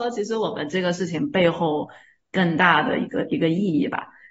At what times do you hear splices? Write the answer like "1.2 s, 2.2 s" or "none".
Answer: none

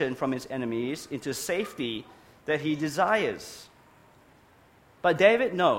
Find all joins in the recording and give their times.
none

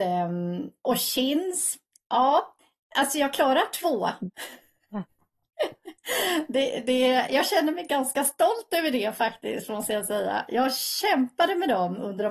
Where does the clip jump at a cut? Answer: none

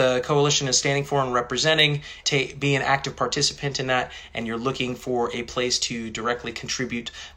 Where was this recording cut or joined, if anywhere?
2.2 s

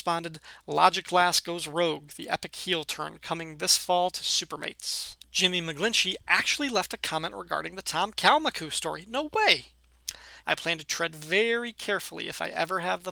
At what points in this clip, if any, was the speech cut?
5.2 s, 10.4 s

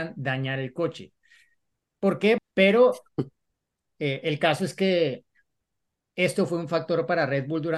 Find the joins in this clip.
2.4 s

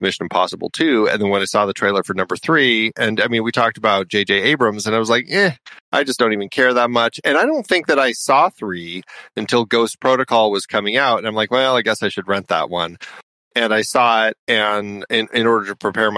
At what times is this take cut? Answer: none

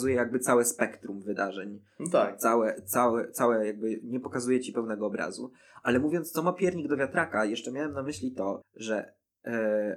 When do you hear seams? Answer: 8.6 s

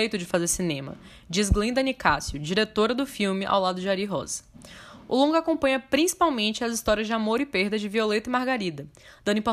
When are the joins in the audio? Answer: none

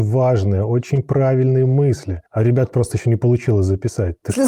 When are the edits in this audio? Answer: 2.3 s

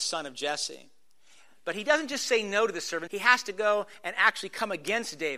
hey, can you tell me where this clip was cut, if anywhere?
3.1 s

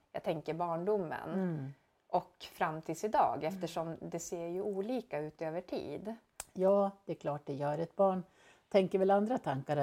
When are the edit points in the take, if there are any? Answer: none

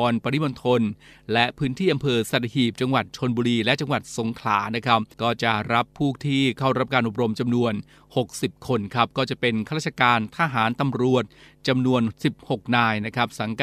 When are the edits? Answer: 5.1 s

